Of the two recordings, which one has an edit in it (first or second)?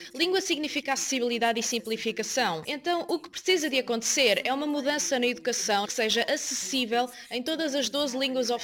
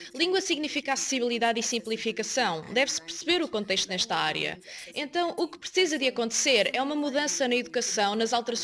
first